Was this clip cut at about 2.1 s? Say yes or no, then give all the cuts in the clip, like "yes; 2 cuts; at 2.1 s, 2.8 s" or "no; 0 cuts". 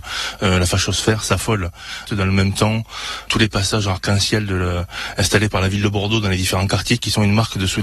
yes; 1 cut; at 2.1 s